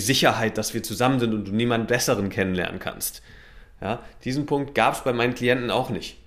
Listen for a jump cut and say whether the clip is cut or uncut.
uncut